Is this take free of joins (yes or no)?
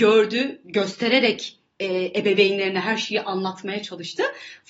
yes